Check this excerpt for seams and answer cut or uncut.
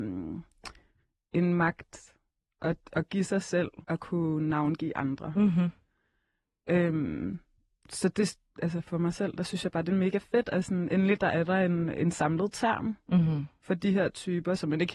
cut